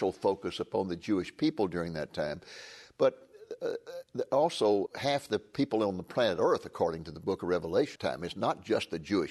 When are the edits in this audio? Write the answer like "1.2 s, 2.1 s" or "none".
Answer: 4.9 s, 8.0 s